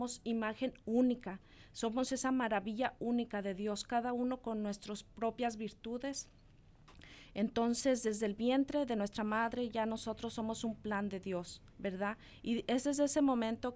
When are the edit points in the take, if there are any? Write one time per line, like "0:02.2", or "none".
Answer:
0:11.7

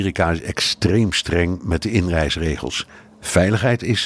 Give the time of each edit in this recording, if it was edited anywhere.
none

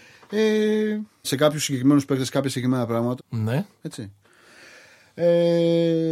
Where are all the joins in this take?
0:01.2
0:03.2

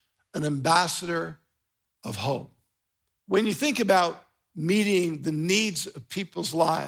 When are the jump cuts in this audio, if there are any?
0:03.2

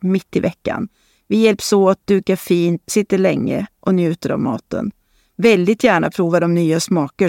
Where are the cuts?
0:02.9

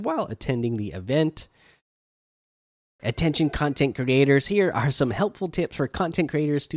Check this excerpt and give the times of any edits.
0:03.0

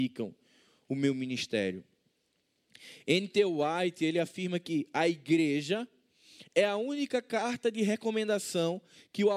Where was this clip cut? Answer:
none

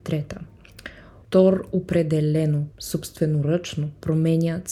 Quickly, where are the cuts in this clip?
0:01.2
0:02.7

